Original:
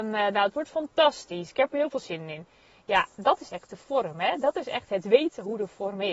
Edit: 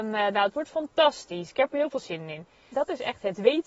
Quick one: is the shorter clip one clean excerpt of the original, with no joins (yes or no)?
no